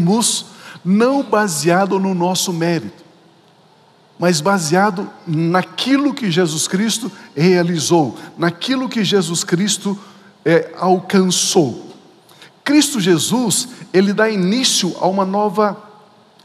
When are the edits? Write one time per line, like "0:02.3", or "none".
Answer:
none